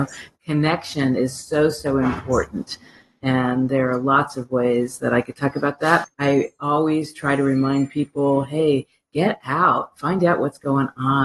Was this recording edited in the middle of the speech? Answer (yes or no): yes